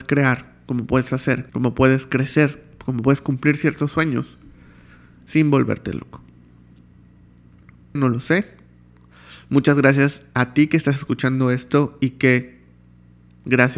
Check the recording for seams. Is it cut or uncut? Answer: cut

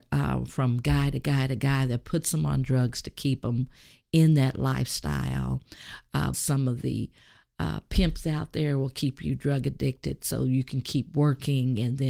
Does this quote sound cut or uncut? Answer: cut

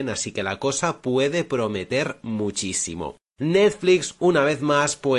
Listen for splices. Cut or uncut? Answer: uncut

